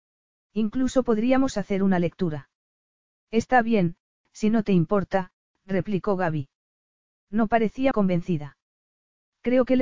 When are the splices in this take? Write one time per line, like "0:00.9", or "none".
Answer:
0:07.9